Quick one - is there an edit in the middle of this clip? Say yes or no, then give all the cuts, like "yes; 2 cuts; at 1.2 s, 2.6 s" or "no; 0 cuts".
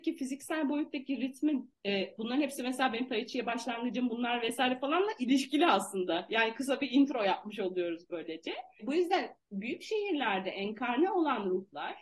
no; 0 cuts